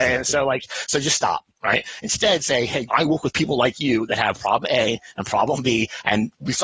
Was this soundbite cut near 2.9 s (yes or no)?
yes